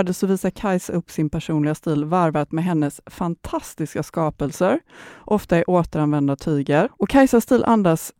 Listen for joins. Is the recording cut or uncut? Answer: cut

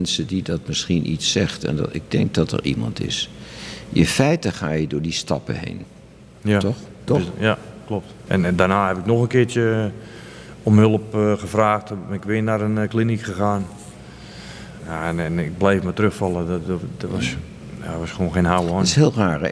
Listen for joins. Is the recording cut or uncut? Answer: cut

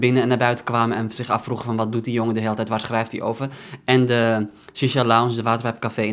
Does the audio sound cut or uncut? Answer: uncut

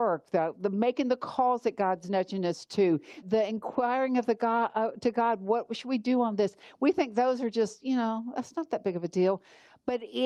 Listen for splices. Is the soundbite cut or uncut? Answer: cut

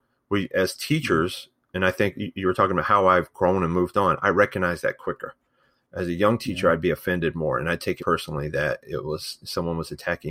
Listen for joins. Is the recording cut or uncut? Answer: cut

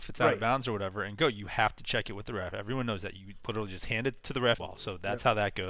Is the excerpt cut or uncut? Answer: cut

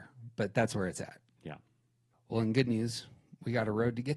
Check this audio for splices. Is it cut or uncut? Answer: uncut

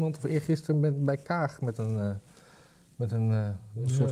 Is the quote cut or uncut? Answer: uncut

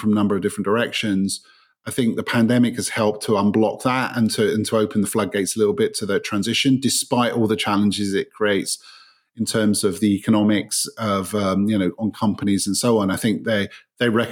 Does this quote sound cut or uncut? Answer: uncut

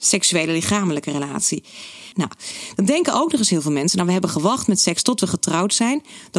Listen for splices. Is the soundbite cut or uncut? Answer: cut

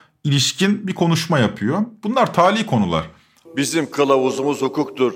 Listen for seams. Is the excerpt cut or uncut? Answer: cut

